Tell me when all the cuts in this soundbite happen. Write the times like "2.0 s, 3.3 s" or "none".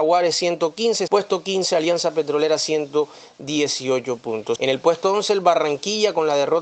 1.1 s, 4.6 s